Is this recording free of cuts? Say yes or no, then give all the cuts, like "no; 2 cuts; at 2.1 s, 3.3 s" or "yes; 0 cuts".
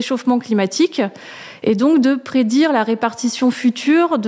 yes; 0 cuts